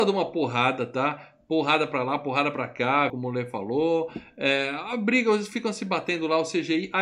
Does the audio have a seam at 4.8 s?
no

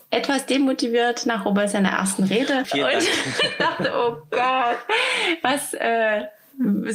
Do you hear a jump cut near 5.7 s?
no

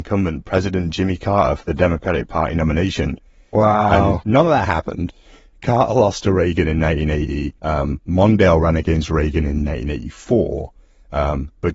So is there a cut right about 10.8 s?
no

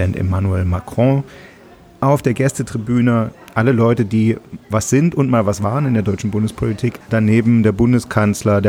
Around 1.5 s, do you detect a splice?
no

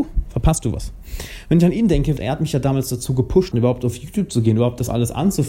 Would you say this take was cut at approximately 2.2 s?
yes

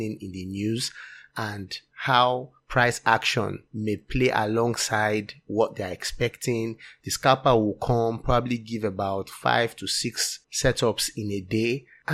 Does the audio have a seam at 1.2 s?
no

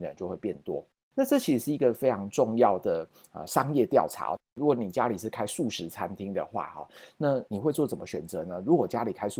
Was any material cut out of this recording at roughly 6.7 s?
no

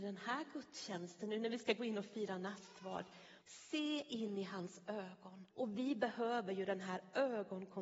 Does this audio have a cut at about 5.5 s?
yes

